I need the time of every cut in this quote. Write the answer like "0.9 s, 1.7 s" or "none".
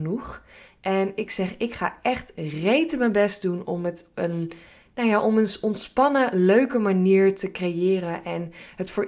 none